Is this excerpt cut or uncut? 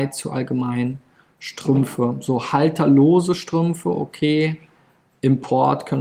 uncut